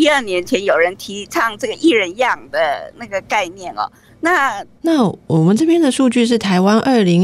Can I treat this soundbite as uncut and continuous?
no; 1 cut; at 4.8 s

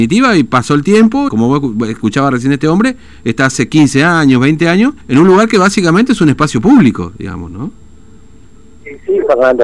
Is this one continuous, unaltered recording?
no; 2 cuts; at 1.3 s, 5.0 s

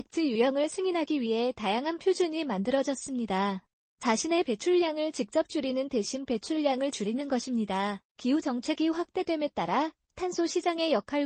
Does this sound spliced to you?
yes; 2 cuts; at 3.9 s, 8.1 s

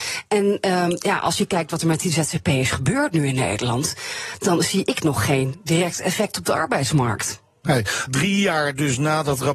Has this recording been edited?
yes; 1 cut; at 8.1 s

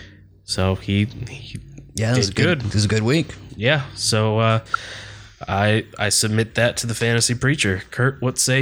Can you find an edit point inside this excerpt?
no; 0 cuts

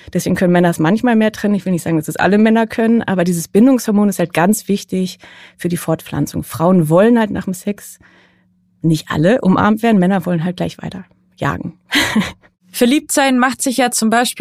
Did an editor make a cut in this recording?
no; 0 cuts

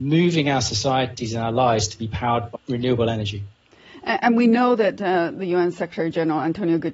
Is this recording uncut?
no; 1 cut; at 2.6 s

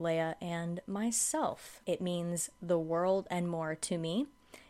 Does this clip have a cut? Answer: yes; 1 cut; at 1.8 s

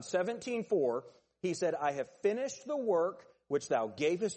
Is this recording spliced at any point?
no; 0 cuts

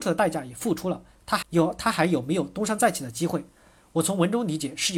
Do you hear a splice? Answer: yes; 1 cut; at 1.4 s

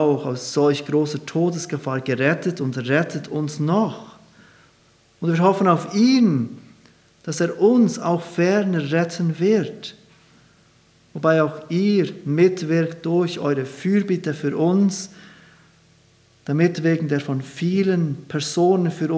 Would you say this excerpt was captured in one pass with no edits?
yes; 0 cuts

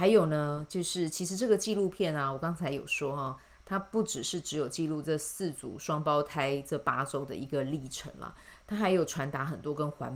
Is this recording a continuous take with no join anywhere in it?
yes; 0 cuts

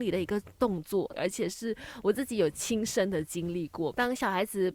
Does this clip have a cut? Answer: yes; 1 cut; at 1.1 s

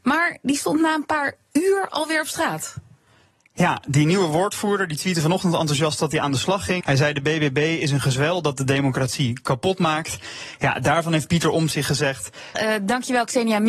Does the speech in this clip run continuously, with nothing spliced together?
no; 2 cuts; at 6.8 s, 12.5 s

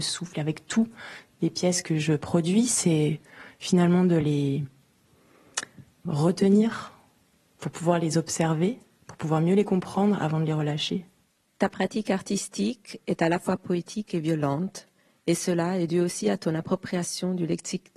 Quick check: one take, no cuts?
no; 1 cut; at 6.1 s

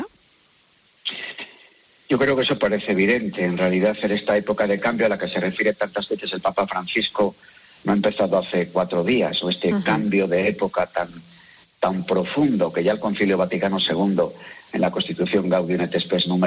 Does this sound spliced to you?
no; 0 cuts

